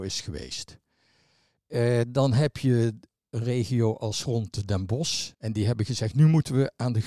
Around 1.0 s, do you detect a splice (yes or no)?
no